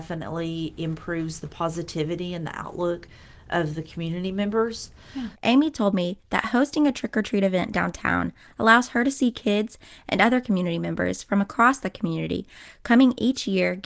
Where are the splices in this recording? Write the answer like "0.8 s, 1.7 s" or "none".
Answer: 5.4 s